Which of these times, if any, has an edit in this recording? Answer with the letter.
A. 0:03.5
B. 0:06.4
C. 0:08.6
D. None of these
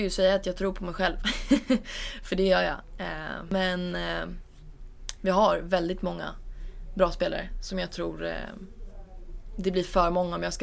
D